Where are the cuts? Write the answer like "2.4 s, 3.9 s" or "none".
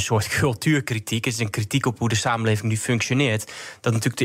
none